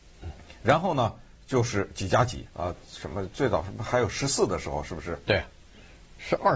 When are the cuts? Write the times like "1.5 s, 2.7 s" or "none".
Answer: 2.5 s